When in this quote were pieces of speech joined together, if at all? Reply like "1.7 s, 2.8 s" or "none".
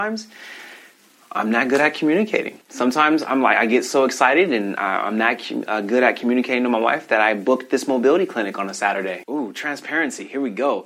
2.6 s, 9.2 s

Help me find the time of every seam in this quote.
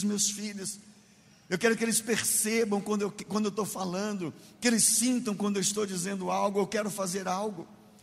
none

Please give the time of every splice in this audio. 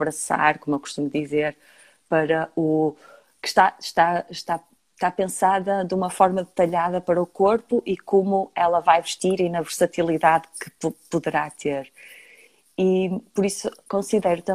10.5 s

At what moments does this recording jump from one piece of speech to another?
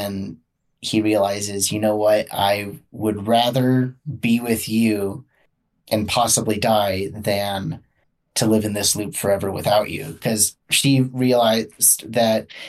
none

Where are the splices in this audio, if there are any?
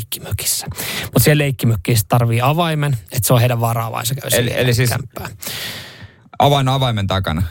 none

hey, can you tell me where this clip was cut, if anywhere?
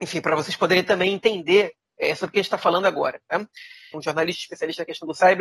3.9 s

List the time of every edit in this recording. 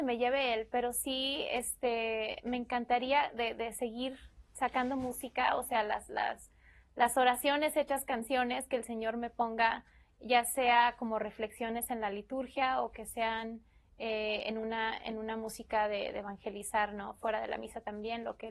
none

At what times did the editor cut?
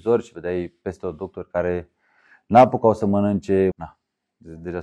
3.7 s

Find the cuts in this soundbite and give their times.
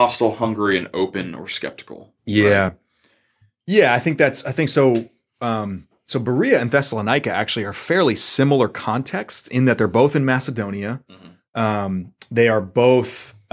none

